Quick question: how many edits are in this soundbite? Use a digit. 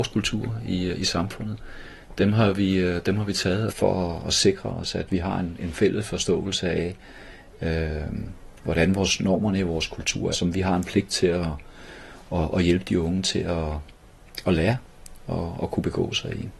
2